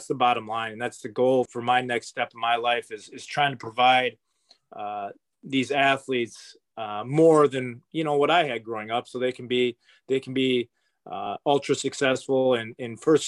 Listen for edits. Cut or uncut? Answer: cut